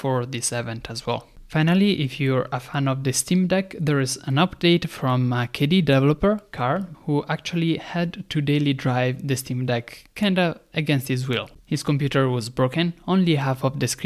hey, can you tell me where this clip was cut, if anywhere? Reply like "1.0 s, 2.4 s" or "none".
6.9 s

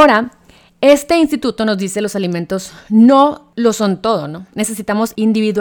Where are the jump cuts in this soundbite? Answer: none

